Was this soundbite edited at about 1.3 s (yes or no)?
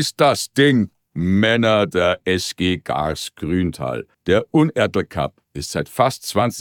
no